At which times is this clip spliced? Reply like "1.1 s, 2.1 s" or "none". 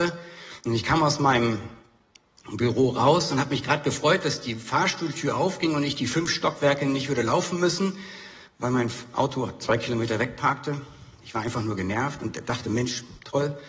none